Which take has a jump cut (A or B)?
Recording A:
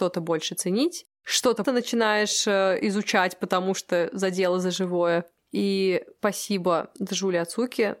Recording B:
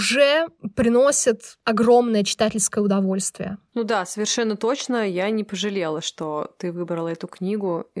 A